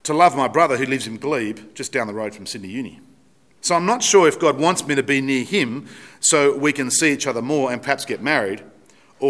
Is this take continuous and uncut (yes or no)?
no